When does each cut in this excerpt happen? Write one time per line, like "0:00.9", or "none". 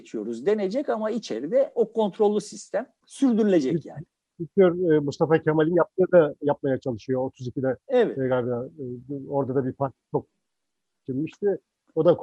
none